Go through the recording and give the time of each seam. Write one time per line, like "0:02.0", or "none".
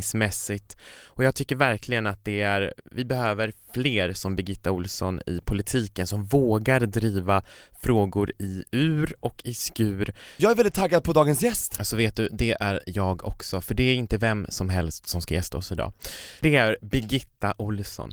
0:10.4